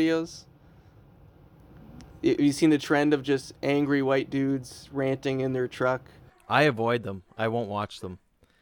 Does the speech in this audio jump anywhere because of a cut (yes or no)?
no